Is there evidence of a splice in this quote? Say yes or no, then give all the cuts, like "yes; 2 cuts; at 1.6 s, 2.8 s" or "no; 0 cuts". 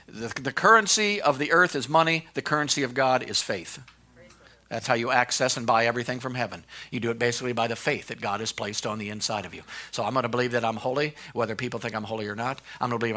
no; 0 cuts